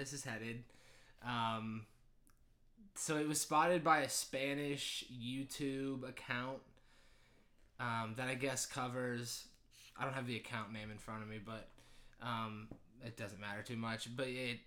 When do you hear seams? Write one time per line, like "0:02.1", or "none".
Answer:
none